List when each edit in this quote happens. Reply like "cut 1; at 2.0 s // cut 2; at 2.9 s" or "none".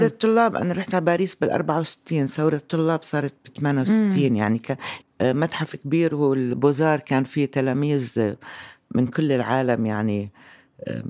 cut 1; at 5.0 s